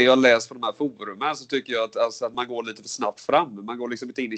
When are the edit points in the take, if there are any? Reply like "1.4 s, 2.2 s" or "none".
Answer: none